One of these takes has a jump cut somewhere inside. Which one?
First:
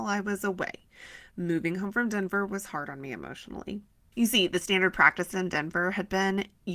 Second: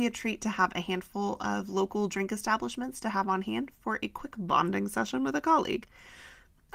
first; 1 cut; at 4.1 s

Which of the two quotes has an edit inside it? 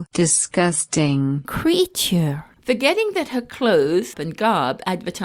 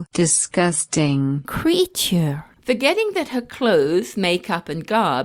first; 1 cut; at 4.1 s

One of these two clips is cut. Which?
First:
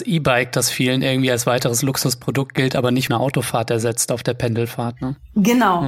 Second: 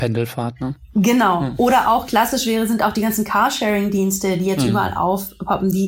first; 1 cut; at 3.1 s

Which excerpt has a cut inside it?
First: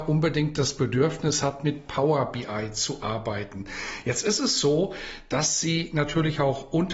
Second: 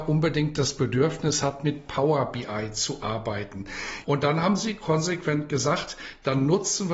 second; 1 cut; at 4.0 s

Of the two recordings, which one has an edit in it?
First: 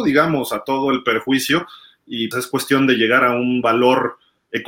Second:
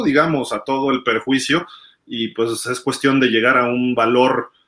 first; 1 cut; at 2.3 s

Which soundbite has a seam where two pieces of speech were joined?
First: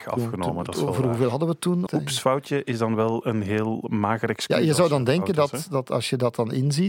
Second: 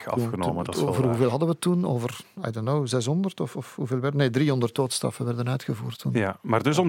first; 1 cut; at 1.9 s

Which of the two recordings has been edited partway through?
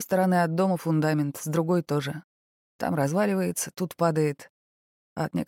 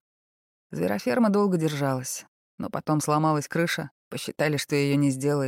second; 1 cut; at 4.0 s

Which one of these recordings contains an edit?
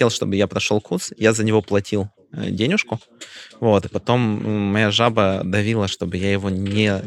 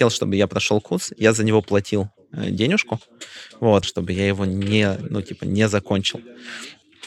second; 1 cut; at 3.8 s

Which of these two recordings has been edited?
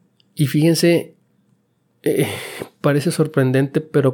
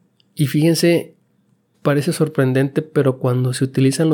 second; 1 cut; at 1.7 s

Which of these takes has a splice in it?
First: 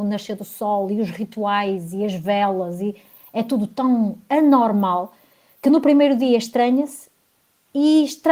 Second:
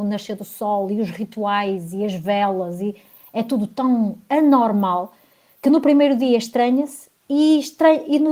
second; 1 cut; at 7.2 s

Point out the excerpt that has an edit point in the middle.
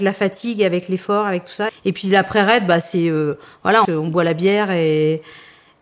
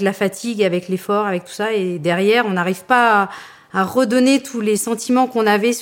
first; 2 cuts; at 1.7 s, 3.8 s

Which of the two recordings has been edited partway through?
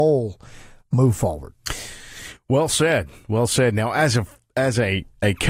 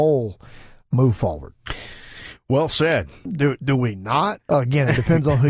second; 2 cuts; at 3.3 s, 4.4 s

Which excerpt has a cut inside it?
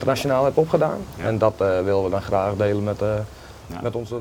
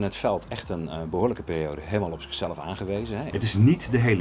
second; 1 cut; at 3.3 s

